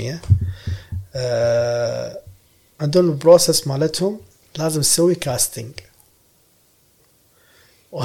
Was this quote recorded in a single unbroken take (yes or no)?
no